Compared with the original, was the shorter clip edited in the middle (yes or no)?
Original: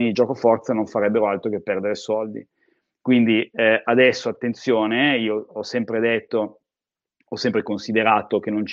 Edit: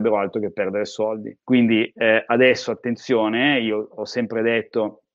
yes